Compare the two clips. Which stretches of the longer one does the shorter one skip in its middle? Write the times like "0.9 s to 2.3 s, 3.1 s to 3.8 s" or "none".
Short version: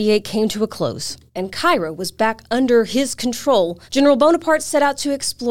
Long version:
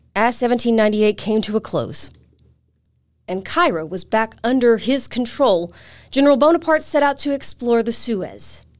2.2 s to 3.2 s, 5.8 s to 6.1 s

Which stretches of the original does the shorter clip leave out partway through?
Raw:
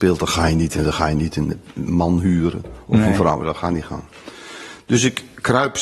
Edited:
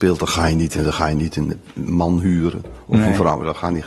none

